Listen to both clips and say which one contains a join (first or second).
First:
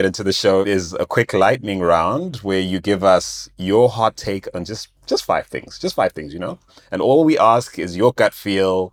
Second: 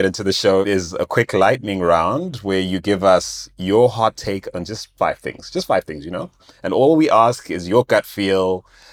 second